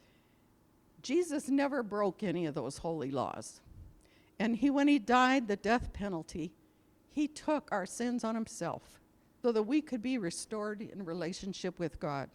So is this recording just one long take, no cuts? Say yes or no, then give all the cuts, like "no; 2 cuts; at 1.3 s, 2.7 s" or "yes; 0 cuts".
no; 1 cut; at 9.4 s